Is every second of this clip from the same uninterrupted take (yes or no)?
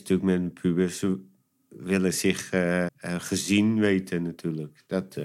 no